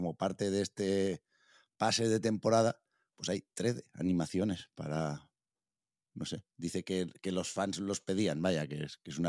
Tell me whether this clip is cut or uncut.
cut